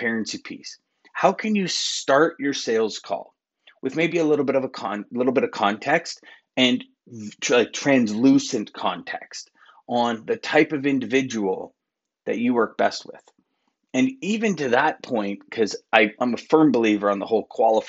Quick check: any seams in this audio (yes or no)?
no